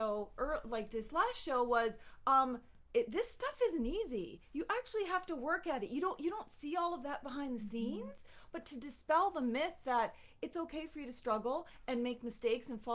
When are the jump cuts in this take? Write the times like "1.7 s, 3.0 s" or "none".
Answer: none